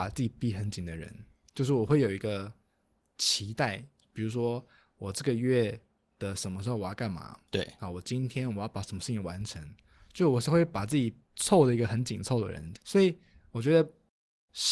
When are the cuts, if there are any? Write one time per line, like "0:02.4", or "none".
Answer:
0:11.2
0:12.8